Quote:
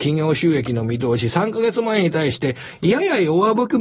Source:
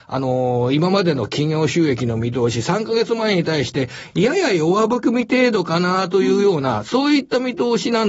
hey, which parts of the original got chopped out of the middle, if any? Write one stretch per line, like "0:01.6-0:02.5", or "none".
none